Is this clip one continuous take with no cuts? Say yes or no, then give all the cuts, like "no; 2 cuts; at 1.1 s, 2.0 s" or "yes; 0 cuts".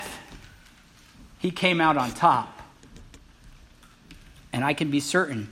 yes; 0 cuts